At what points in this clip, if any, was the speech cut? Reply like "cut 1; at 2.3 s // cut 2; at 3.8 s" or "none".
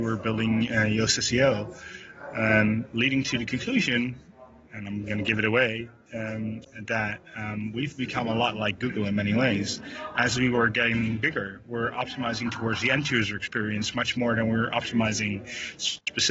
none